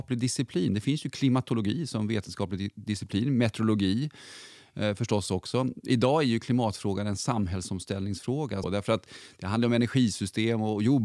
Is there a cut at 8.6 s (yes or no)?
yes